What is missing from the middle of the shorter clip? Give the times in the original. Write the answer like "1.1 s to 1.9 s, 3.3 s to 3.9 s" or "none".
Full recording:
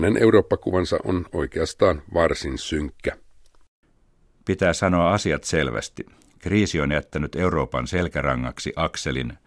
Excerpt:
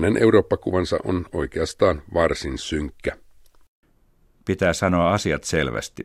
none